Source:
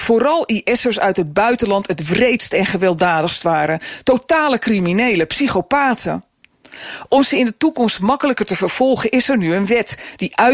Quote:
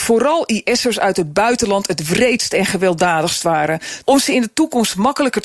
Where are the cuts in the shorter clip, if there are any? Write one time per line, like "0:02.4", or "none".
0:04.0